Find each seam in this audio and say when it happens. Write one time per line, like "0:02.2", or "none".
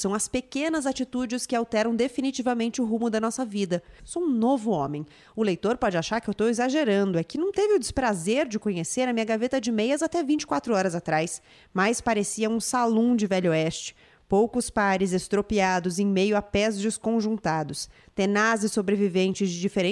0:04.0